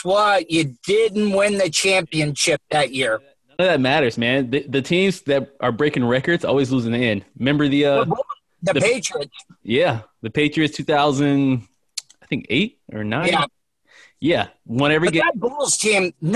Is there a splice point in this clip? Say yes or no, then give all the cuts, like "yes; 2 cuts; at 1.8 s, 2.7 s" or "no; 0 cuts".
no; 0 cuts